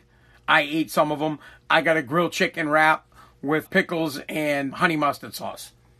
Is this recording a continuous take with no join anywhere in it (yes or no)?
no